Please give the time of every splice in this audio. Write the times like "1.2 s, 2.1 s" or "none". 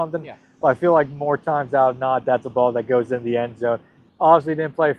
4.1 s